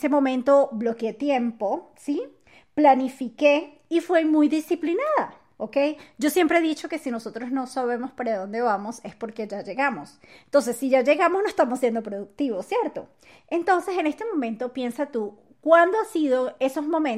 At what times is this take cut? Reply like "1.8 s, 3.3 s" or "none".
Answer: 5.6 s

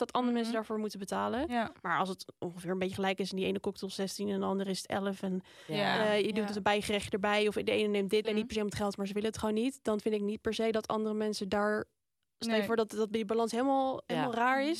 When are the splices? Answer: 8.2 s

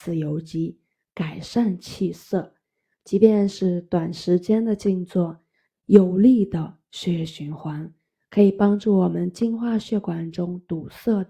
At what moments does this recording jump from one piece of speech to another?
5.7 s

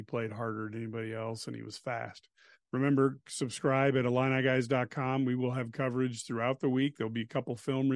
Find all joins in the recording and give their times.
2.5 s

